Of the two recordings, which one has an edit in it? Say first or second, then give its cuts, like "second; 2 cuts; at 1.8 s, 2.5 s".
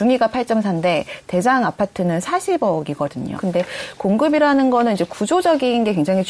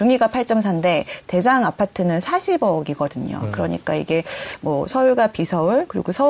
first; 1 cut; at 3.4 s